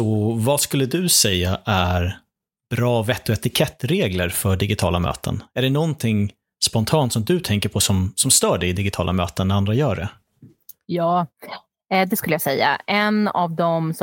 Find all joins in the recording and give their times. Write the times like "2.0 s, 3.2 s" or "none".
none